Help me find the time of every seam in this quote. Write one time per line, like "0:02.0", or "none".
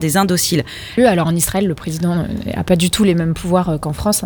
0:01.0